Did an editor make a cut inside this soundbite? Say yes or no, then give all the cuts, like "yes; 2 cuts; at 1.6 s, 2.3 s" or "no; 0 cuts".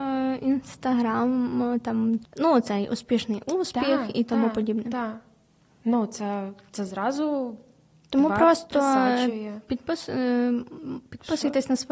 yes; 1 cut; at 2.2 s